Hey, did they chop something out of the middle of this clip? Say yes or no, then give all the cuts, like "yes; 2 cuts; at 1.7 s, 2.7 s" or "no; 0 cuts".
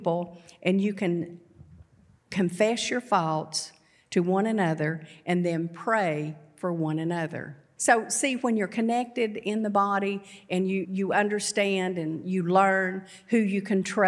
yes; 2 cuts; at 7.8 s, 10.8 s